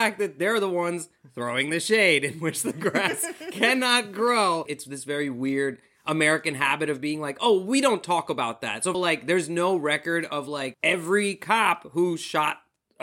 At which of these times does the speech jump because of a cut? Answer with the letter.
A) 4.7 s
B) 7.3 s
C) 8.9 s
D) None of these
C